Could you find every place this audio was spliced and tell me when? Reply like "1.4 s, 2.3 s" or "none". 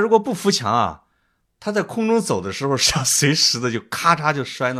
none